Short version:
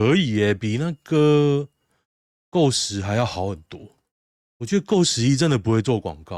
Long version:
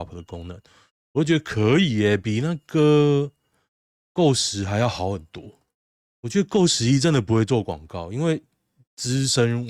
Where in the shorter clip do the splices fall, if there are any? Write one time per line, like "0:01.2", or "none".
none